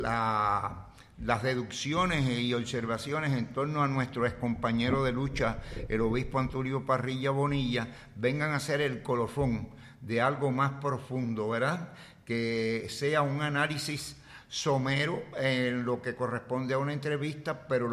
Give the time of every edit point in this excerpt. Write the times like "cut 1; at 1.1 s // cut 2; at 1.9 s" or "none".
none